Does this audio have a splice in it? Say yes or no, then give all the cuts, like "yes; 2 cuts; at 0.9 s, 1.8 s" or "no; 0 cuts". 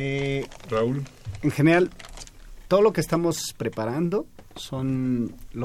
no; 0 cuts